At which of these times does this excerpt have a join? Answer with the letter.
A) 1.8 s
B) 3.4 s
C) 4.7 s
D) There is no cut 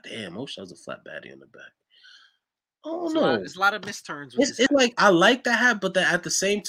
D